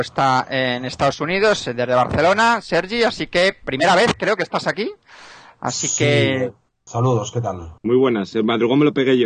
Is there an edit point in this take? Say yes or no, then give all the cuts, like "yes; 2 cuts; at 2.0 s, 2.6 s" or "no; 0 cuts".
yes; 1 cut; at 7.8 s